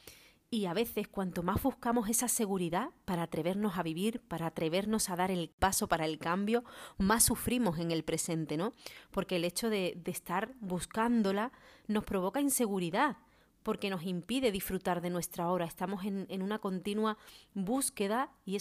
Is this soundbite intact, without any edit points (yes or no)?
yes